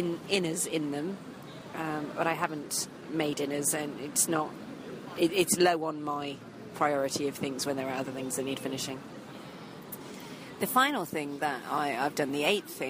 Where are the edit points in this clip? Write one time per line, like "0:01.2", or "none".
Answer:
none